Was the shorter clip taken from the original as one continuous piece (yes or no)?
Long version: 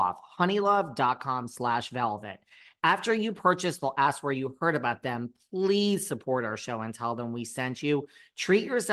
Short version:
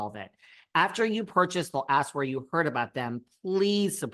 yes